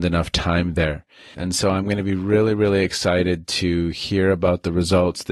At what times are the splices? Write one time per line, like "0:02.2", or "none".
0:01.3